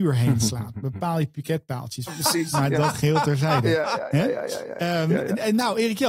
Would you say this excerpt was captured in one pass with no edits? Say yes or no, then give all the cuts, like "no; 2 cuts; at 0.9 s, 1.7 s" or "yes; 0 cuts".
no; 1 cut; at 2.1 s